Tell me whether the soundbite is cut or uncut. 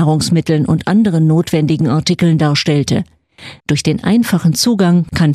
cut